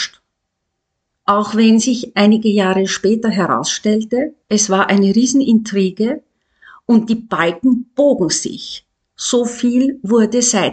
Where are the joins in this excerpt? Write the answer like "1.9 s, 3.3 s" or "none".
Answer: 1.1 s, 4.4 s